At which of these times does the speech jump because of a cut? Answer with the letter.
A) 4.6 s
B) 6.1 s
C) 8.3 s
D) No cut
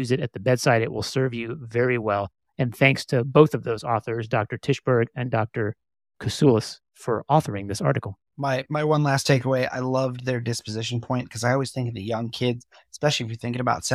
C